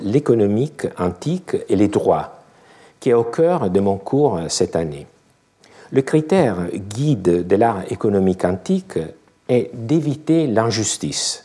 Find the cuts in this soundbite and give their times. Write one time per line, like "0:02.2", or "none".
none